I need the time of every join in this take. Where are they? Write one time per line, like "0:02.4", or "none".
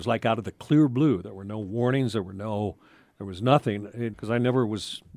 0:04.1